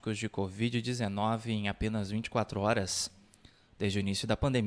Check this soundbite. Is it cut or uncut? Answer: uncut